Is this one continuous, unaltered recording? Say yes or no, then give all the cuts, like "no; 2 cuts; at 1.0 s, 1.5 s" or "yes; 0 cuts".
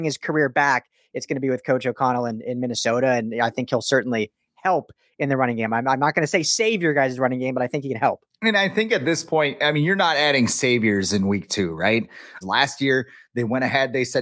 no; 1 cut; at 12.4 s